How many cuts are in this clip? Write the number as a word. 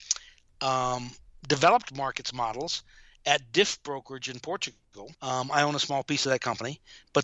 one